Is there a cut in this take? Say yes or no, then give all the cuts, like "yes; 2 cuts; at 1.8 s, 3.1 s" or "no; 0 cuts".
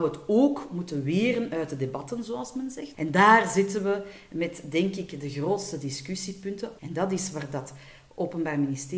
yes; 2 cuts; at 2.9 s, 6.8 s